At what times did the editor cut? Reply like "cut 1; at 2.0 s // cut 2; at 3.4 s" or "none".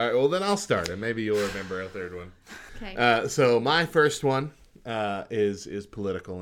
cut 1; at 2.7 s